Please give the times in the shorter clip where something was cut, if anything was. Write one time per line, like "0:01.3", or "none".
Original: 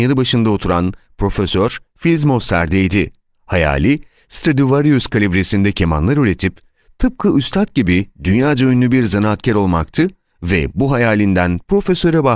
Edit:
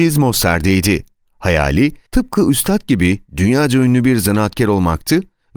0:02.1